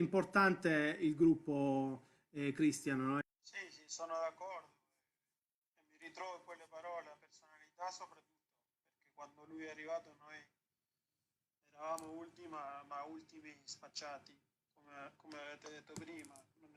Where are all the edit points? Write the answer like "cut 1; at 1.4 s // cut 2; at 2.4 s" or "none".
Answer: cut 1; at 3.2 s